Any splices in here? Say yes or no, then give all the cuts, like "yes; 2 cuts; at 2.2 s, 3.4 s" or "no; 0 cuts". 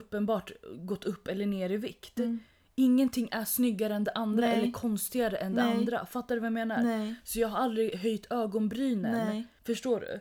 no; 0 cuts